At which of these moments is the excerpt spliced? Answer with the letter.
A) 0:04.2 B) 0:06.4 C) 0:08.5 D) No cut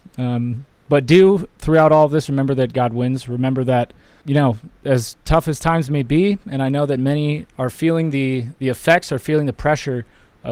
A